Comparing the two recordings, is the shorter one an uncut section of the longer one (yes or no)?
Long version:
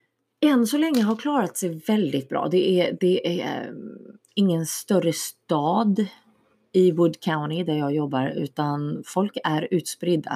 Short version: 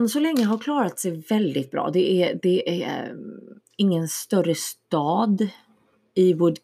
yes